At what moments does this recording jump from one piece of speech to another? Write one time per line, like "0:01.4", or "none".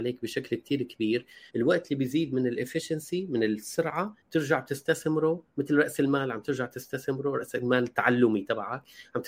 0:01.5
0:04.2